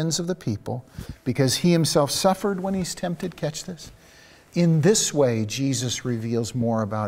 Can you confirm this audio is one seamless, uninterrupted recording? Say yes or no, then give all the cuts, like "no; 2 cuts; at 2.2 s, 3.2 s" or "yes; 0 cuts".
no; 1 cut; at 4.5 s